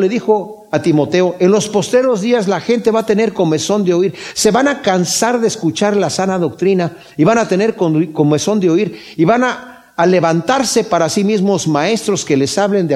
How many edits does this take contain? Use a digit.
0